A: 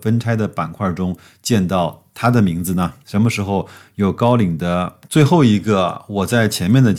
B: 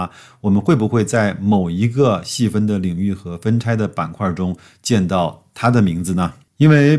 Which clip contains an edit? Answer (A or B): A